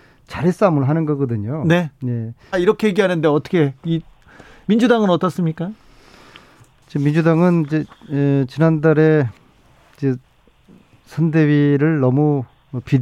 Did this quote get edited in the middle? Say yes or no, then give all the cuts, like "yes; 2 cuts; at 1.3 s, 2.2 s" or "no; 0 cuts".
yes; 1 cut; at 2.5 s